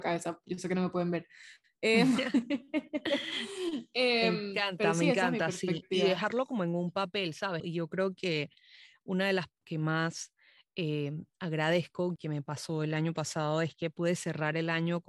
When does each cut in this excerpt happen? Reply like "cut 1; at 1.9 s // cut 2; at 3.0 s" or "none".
cut 1; at 7.6 s // cut 2; at 9.6 s // cut 3; at 12.2 s